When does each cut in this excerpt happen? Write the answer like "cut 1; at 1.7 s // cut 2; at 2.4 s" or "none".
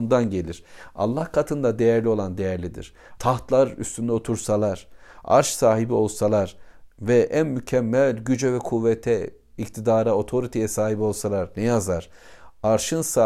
cut 1; at 3.2 s